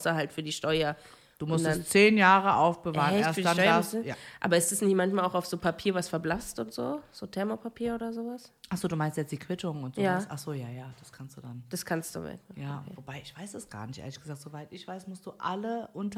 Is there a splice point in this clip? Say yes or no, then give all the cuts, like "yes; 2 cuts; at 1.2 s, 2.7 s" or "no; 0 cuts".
no; 0 cuts